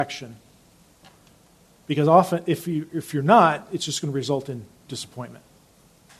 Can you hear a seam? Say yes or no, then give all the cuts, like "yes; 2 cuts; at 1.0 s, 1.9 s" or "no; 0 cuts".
no; 0 cuts